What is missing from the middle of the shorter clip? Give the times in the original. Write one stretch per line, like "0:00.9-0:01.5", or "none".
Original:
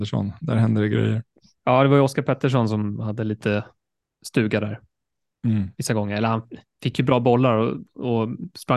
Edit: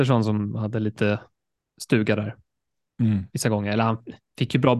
none